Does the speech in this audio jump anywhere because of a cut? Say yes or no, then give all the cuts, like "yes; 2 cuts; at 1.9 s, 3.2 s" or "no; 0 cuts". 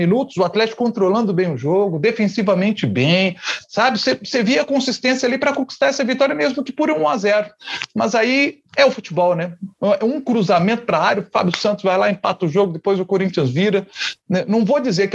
no; 0 cuts